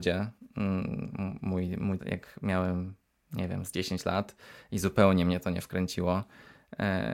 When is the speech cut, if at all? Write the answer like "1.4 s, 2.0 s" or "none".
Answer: 2.0 s